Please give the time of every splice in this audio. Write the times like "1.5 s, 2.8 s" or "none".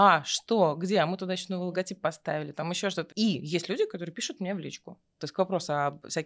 3.1 s, 5.2 s

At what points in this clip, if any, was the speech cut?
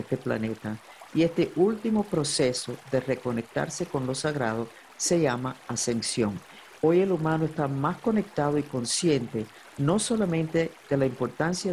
6.8 s

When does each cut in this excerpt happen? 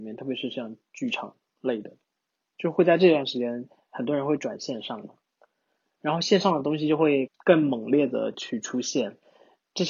7.3 s

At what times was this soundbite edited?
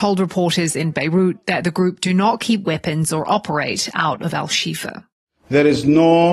none

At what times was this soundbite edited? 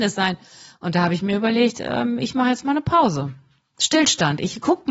none

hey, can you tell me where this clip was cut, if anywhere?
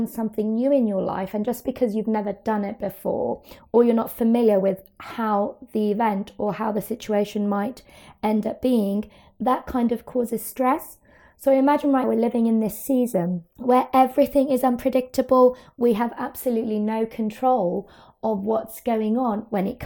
12.0 s

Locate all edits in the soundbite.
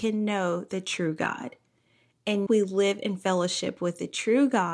2.5 s

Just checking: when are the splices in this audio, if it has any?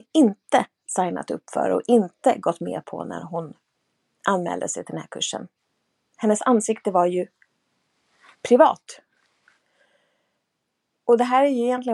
none

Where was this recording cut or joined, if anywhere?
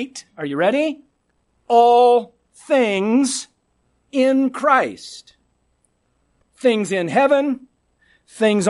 none

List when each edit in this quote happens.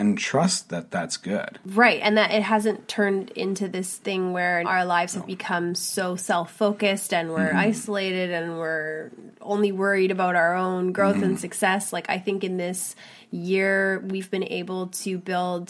4.6 s

